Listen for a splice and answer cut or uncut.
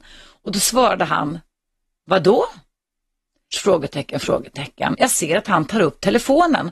cut